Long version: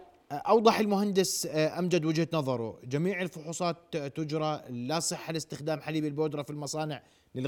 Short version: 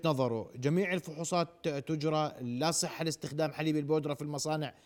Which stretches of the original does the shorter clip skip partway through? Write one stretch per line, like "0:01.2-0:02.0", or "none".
none